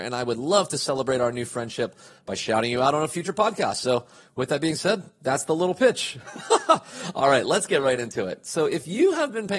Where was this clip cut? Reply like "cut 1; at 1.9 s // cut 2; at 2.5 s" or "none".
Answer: none